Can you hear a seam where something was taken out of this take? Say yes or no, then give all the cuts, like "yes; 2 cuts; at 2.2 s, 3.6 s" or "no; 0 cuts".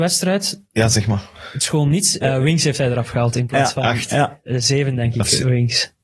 yes; 1 cut; at 2.2 s